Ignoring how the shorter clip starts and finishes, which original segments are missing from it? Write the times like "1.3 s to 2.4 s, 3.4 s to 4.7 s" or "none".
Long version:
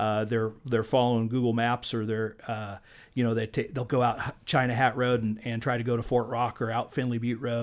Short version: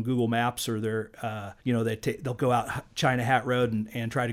2.9 s to 3.1 s